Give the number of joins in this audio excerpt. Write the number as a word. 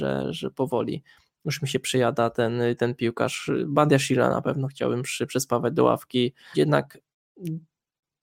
one